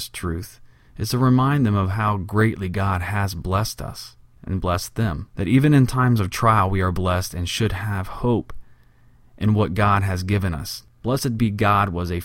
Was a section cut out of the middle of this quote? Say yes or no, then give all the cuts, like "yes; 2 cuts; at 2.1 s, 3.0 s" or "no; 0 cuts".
no; 0 cuts